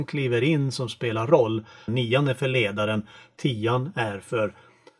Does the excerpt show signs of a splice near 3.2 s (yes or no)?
no